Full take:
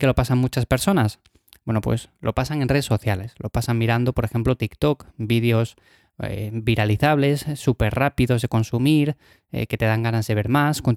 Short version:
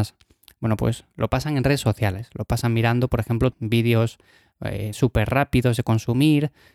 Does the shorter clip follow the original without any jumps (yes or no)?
no